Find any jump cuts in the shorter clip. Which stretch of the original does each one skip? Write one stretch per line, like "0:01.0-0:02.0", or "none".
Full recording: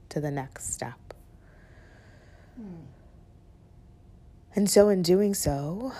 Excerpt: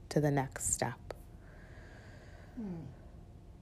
none